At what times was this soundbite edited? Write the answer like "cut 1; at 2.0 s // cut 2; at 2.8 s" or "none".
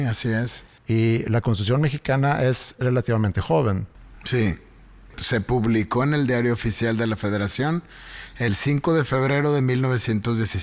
none